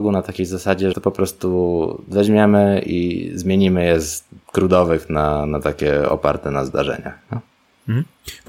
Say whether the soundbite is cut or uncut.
cut